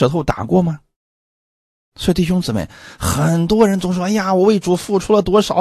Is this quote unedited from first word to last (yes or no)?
yes